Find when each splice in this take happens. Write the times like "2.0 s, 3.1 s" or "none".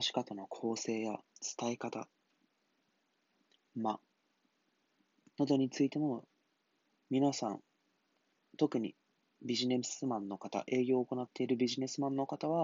6.9 s